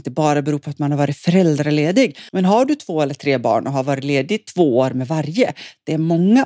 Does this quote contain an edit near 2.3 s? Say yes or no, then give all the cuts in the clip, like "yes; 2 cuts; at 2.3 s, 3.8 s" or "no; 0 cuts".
yes; 1 cut; at 2.3 s